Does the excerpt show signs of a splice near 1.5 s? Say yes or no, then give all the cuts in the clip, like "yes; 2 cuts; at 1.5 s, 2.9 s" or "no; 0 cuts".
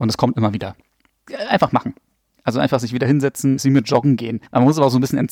no; 1 cut; at 3.6 s